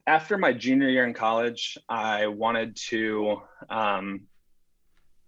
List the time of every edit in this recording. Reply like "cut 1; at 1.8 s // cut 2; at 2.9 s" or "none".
none